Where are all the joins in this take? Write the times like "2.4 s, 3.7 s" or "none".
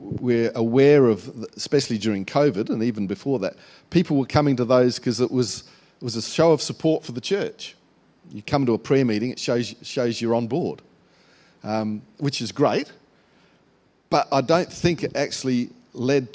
none

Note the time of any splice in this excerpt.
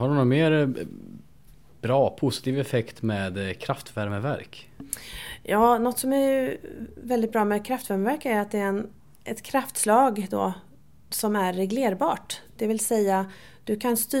none

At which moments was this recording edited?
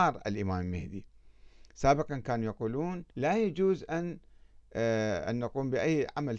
3.1 s

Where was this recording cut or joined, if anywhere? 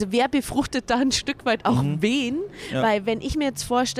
none

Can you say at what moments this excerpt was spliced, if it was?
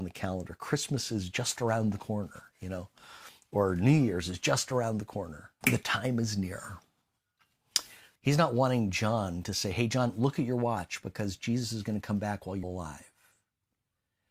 5.6 s, 8.2 s, 12.6 s

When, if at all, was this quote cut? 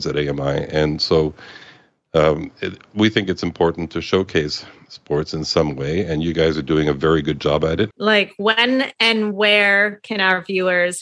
7.9 s

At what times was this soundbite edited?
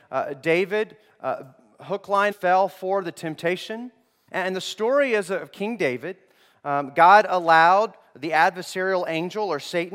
2.3 s, 4.3 s

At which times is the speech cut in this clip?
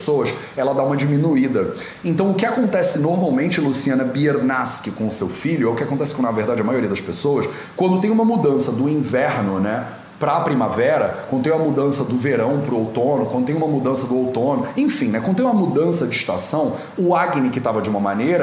none

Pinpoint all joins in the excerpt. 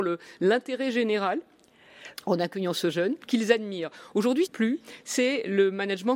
3.2 s, 4.5 s

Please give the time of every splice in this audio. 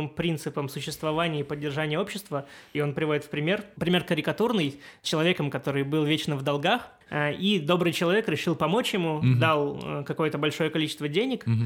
3.7 s

